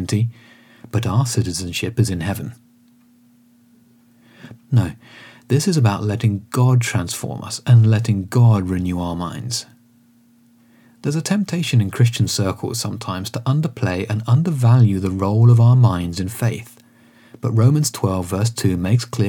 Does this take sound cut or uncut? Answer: cut